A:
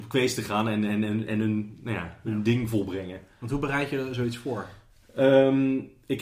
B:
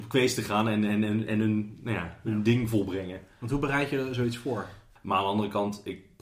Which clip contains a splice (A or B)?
B